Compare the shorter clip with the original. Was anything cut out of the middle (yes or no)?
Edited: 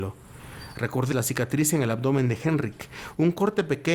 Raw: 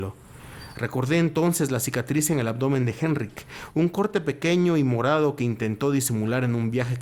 yes